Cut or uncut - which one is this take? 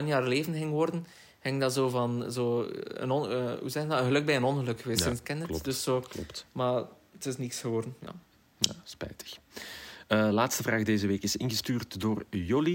uncut